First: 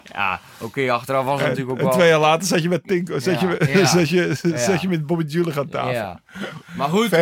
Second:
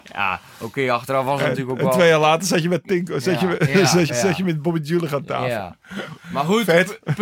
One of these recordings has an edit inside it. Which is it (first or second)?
second